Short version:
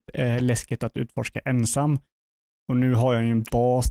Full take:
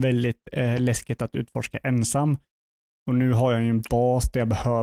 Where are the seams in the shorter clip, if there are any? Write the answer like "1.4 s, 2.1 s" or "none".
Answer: none